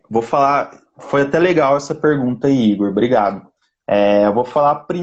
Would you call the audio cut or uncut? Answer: uncut